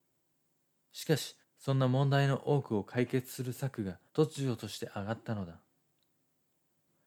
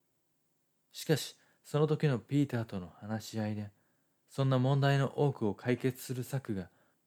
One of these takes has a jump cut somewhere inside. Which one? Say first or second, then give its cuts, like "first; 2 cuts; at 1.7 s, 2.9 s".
first; 2 cuts; at 1.4 s, 4.1 s